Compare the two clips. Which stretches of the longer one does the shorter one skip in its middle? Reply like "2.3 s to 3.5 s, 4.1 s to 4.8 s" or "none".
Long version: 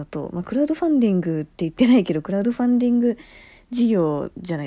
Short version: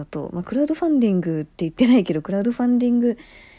none